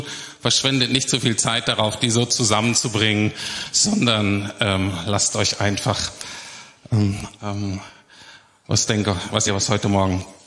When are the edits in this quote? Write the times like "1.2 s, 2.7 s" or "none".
7.4 s, 9.5 s